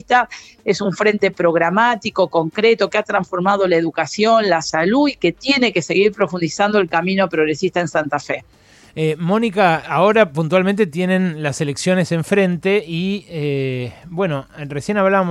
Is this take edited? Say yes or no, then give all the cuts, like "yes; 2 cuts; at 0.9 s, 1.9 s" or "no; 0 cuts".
yes; 1 cut; at 9.8 s